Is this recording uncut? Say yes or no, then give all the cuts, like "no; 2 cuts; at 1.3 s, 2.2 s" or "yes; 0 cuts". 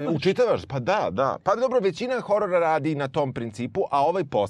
yes; 0 cuts